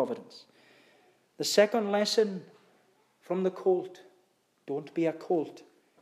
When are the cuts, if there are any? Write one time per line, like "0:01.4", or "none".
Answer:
none